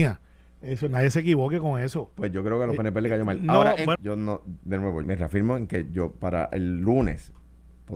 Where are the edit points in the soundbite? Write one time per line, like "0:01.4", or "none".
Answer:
0:04.0
0:05.0